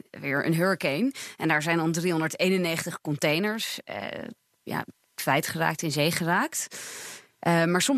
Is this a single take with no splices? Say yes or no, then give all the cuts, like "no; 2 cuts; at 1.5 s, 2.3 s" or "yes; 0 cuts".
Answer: yes; 0 cuts